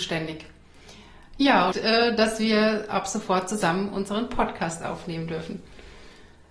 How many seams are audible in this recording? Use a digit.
1